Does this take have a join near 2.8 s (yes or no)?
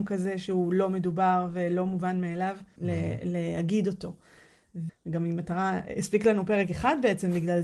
yes